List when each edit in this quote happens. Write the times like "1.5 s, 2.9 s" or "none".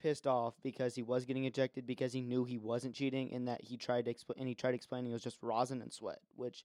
none